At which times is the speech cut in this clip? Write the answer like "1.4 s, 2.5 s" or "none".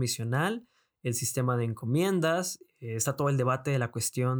none